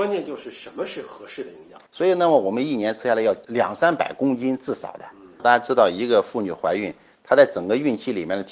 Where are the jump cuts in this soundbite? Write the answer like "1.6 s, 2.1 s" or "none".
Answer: 1.9 s, 5.4 s